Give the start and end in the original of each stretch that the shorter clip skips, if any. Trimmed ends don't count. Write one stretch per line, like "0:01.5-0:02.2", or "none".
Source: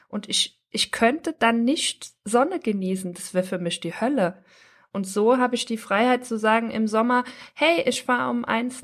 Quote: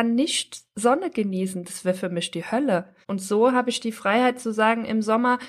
0:04.5-0:04.9